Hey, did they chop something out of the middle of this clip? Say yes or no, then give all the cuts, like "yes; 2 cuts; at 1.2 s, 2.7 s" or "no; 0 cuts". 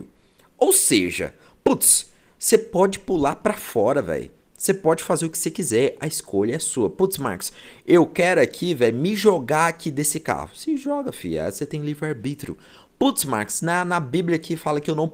no; 0 cuts